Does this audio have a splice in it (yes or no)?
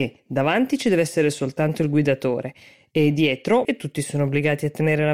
yes